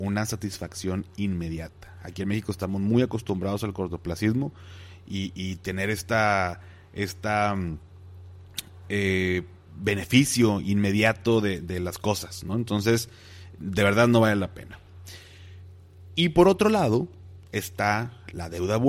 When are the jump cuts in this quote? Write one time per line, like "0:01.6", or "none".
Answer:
none